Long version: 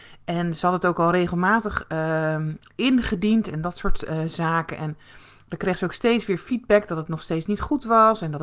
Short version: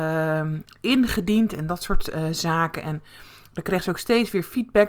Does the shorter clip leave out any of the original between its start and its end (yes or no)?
no